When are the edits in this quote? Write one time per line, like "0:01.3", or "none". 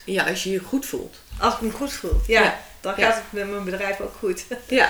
none